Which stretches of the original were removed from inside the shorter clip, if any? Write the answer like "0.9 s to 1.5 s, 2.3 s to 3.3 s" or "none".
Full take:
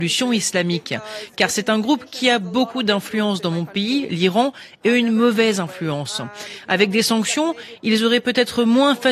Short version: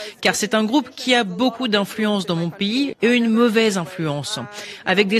4.1 s to 4.8 s